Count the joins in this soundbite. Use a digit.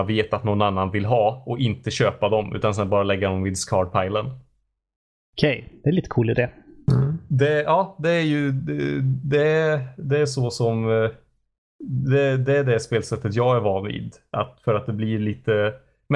1